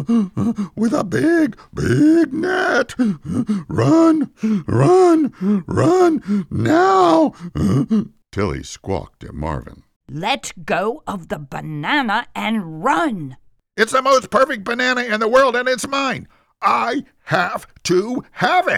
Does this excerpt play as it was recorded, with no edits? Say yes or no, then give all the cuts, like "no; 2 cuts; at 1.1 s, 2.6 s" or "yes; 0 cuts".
no; 1 cut; at 13.6 s